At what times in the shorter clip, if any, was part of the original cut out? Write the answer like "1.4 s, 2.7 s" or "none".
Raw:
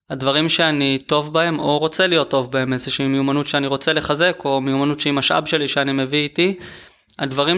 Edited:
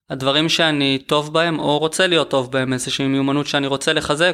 none

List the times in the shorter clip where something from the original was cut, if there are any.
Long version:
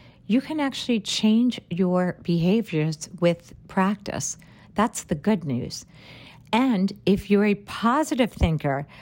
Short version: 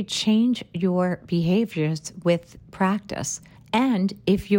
3.6 s

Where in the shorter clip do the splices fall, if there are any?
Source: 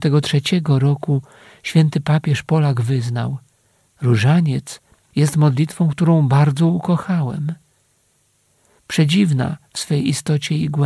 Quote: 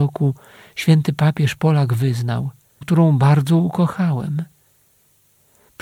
2.8 s

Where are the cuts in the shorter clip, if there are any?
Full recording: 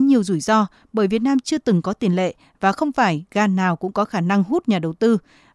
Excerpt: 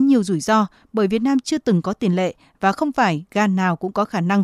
none

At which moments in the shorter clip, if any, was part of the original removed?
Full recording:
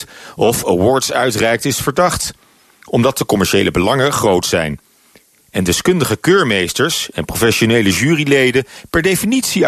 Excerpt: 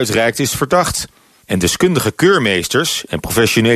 1.4 s

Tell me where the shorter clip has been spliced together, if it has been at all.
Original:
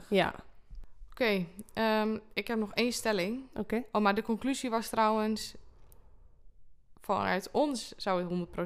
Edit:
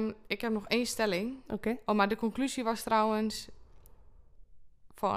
none

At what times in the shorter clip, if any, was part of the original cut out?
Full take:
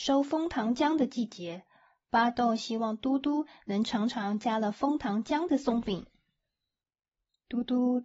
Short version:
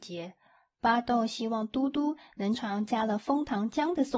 2.5 s

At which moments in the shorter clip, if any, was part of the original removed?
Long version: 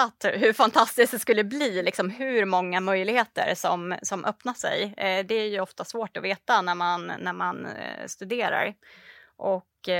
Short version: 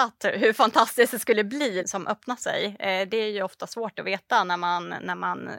1.8 s

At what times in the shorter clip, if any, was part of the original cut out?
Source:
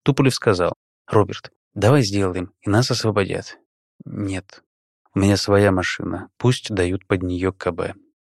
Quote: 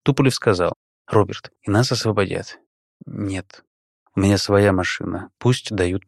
1.6 s

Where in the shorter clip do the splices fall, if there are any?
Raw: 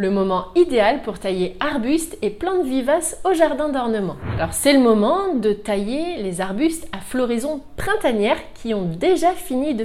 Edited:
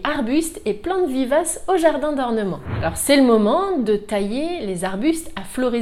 none

